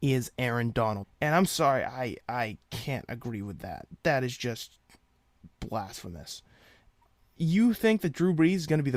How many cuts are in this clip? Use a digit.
1